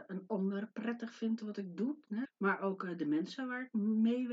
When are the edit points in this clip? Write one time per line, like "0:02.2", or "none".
0:02.2